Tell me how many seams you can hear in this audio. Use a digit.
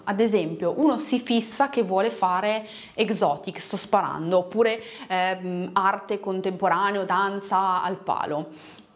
0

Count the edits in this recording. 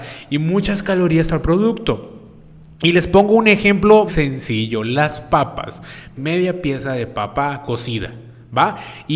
2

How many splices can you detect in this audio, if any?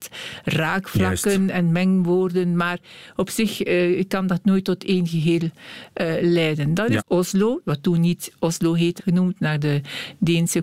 2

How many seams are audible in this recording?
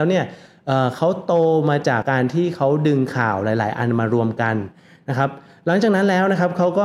1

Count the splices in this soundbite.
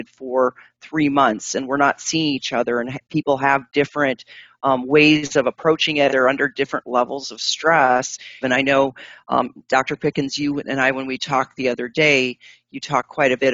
2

